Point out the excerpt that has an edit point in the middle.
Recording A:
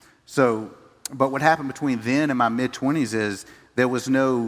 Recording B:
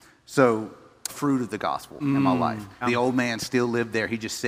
B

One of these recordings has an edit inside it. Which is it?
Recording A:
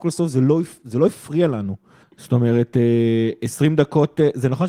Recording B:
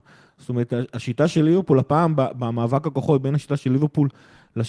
A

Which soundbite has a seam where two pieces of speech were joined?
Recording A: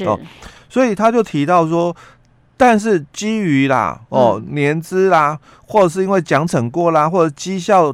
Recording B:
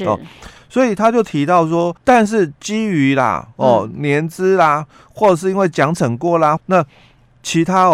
B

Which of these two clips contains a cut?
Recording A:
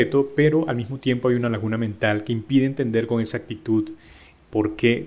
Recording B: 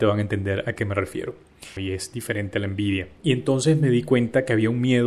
B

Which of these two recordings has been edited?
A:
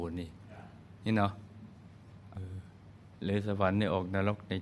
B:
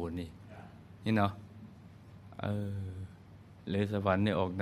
A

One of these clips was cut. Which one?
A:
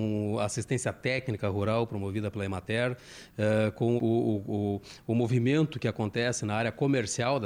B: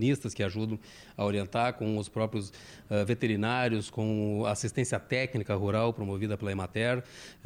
A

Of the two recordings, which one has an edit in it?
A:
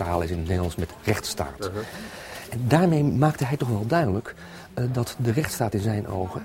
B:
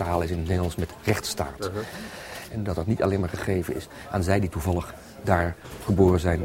B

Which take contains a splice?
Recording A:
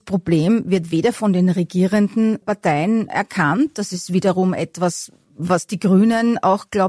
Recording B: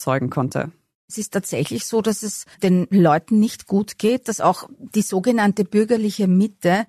B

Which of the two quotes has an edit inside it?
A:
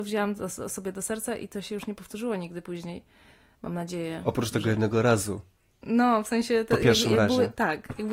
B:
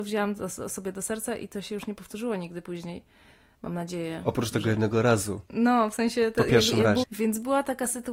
B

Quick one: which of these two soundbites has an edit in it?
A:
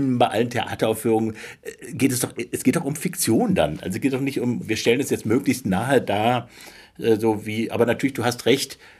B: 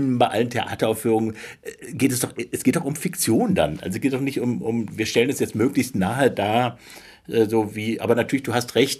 A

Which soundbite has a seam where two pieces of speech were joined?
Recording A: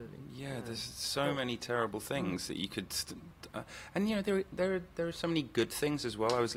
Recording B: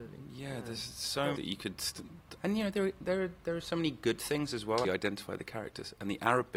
B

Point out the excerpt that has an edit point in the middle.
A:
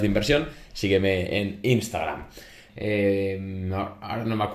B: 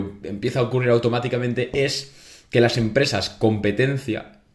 A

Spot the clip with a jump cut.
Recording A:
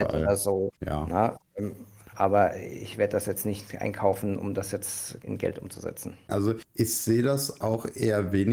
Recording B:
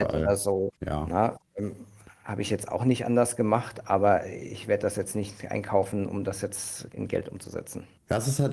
A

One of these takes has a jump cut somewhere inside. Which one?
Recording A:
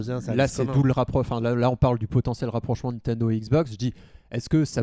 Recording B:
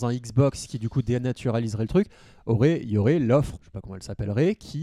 B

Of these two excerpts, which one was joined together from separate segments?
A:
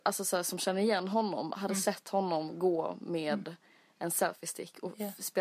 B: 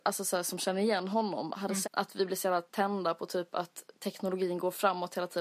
B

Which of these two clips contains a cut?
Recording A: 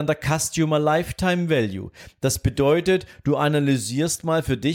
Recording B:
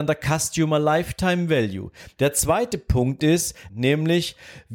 B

